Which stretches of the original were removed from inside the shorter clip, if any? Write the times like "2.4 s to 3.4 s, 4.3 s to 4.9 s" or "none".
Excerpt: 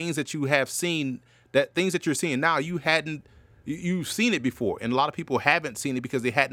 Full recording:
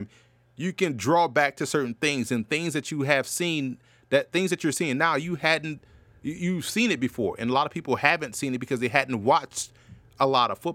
none